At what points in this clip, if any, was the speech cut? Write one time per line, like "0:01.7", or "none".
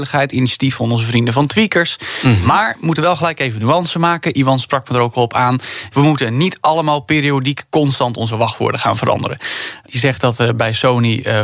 0:05.9
0:09.9